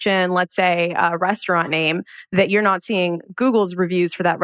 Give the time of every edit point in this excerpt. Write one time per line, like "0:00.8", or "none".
none